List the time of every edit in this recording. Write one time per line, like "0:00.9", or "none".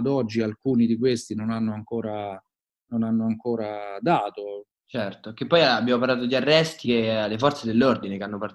0:04.7
0:06.8